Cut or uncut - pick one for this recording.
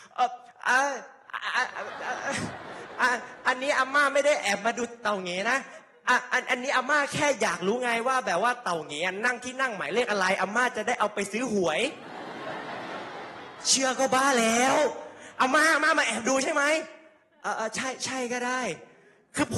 uncut